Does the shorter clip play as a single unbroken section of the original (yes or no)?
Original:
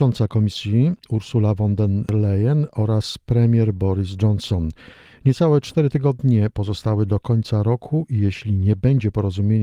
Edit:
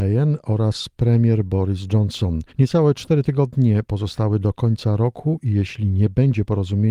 no